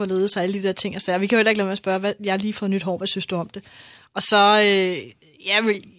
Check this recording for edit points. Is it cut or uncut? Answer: uncut